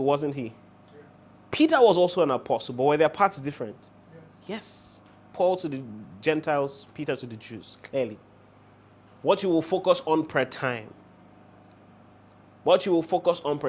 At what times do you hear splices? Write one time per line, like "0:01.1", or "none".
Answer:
0:09.1

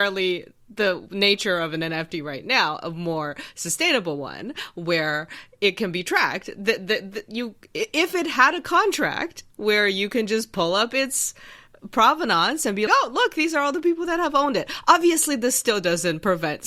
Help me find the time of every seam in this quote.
0:12.9

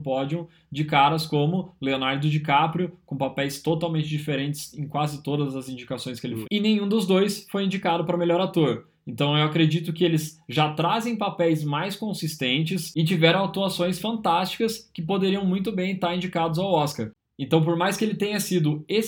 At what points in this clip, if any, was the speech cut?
0:06.4

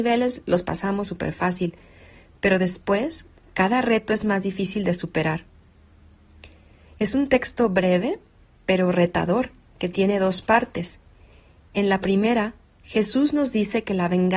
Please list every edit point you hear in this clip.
none

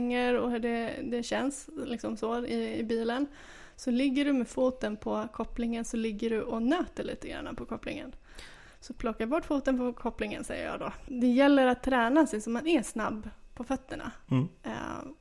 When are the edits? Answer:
0:11.1

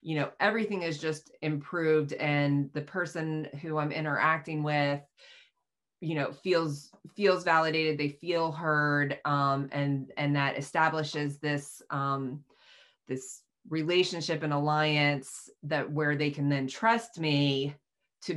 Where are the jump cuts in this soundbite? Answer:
none

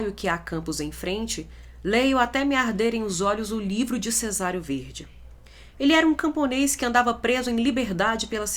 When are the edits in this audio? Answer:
0:05.7

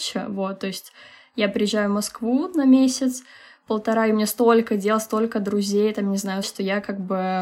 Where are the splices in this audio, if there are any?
0:06.4

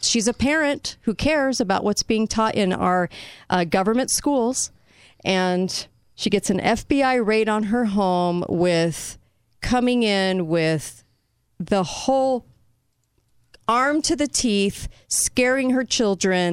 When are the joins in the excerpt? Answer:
none

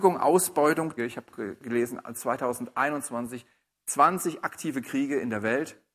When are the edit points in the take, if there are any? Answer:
0:01.0

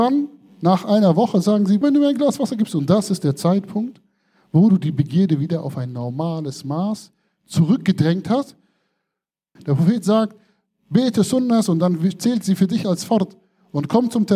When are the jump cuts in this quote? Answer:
0:01.8
0:09.6

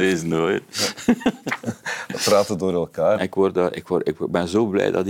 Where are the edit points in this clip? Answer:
0:03.2

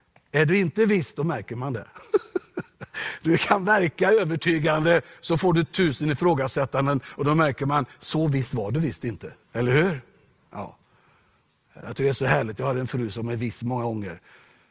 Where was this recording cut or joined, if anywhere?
0:09.4

